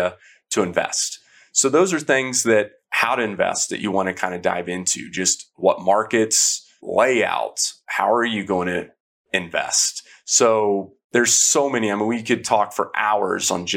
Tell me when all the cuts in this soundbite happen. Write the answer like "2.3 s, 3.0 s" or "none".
6.8 s